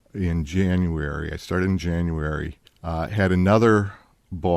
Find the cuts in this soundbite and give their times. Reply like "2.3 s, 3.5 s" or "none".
2.7 s